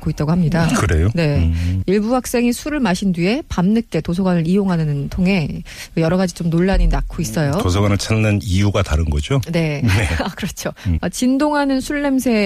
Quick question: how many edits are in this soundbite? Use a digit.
2